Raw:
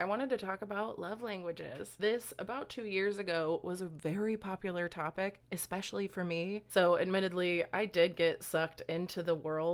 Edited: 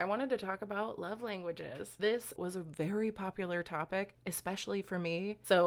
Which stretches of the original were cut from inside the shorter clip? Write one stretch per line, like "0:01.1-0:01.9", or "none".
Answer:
0:02.4-0:03.6